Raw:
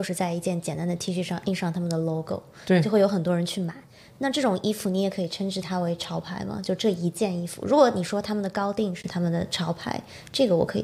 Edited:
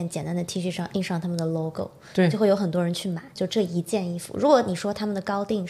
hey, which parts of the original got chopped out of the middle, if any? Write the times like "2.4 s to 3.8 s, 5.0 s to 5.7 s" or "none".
3.9 s to 6.6 s